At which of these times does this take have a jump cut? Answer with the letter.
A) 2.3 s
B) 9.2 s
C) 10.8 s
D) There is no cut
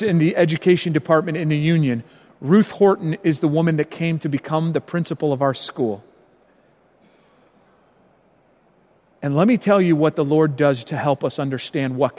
C